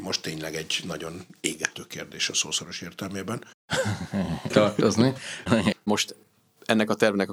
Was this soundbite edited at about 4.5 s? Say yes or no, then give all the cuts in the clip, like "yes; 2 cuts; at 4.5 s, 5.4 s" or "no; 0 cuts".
yes; 2 cuts; at 4.5 s, 5.7 s